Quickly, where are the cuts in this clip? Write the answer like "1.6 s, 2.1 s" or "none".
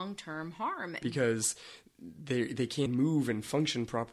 1.0 s, 2.9 s

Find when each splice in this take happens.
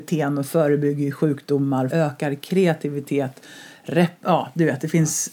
1.9 s

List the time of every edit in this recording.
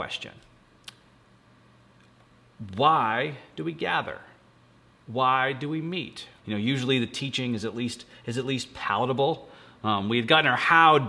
6.4 s

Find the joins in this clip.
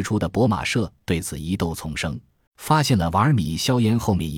2.5 s

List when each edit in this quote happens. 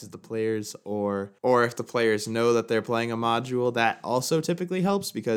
1.4 s

